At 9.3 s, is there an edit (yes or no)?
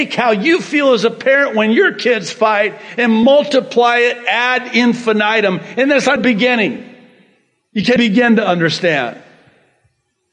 no